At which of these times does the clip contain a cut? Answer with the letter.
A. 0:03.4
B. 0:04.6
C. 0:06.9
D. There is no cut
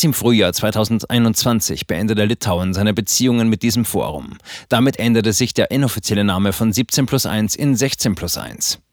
D